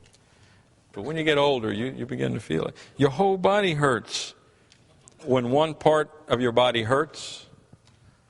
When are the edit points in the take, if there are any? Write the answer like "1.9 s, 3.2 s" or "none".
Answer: 0.9 s, 5.2 s